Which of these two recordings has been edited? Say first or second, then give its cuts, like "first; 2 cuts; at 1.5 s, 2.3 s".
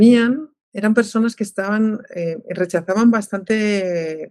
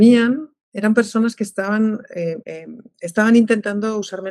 second; 1 cut; at 2.4 s